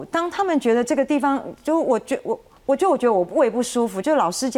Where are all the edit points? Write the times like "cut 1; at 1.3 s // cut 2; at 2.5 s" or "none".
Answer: none